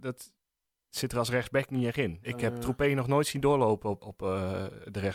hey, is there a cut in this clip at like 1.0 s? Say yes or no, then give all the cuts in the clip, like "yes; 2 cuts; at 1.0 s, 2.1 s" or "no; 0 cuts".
no; 2 cuts; at 2.2 s, 4.0 s